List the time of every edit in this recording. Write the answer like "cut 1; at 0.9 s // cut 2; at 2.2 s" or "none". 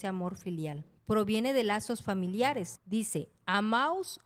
cut 1; at 2.8 s